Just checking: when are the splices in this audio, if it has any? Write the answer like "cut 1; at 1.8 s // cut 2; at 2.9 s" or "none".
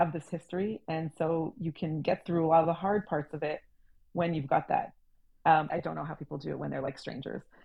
cut 1; at 5.7 s